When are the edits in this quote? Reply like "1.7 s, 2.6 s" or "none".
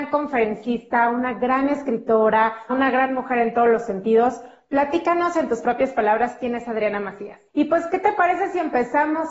2.7 s, 7.5 s